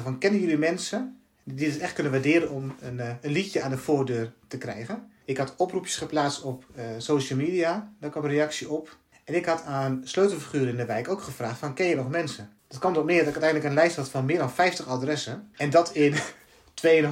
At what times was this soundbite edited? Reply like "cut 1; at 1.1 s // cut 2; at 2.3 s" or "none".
cut 1; at 5.2 s